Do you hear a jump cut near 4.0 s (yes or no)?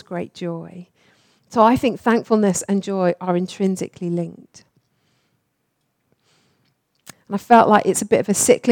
no